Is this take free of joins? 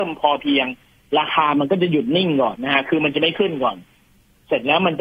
no; 1 cut; at 2.6 s

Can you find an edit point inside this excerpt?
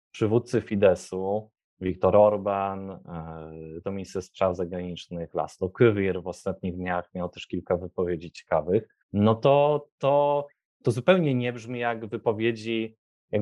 yes; 2 cuts; at 3.8 s, 9.0 s

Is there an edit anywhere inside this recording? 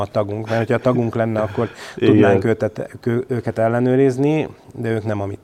no; 0 cuts

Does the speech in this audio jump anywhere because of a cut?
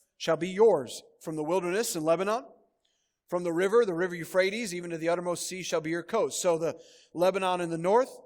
no; 0 cuts

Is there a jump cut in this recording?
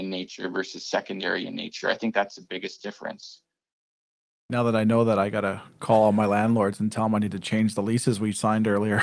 no; 0 cuts

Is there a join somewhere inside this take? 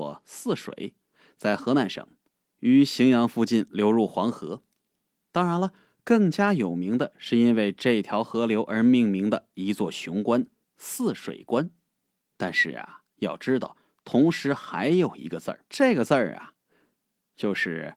yes; 2 cuts; at 12.3 s, 15.7 s

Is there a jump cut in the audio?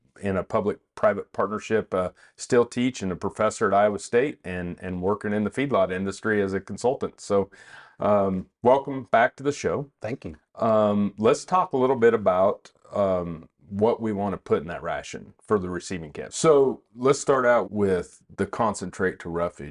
yes; 2 cuts; at 16.3 s, 17.6 s

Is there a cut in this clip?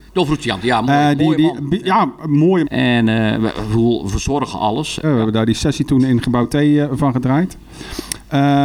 yes; 2 cuts; at 2.6 s, 5.0 s

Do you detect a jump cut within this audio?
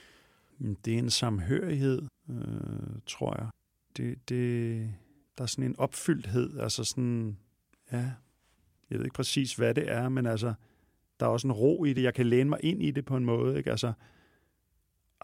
no; 0 cuts

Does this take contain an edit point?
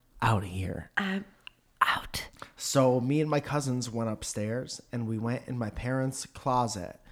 no; 0 cuts

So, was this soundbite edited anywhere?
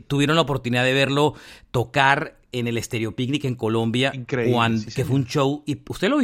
no; 0 cuts

